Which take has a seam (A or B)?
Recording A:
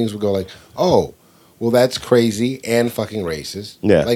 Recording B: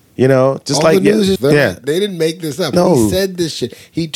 B